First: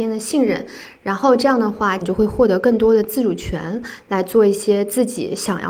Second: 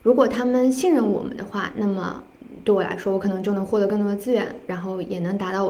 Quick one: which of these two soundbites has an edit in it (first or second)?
first